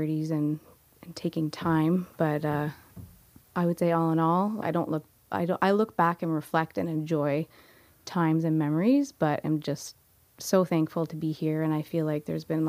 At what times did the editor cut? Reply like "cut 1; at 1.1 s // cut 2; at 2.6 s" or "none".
cut 1; at 4.6 s